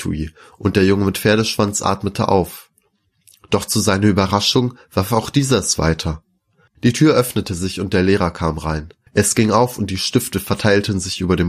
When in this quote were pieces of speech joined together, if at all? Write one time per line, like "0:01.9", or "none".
0:06.7
0:09.1